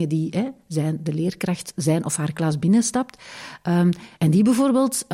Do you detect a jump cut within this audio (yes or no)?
no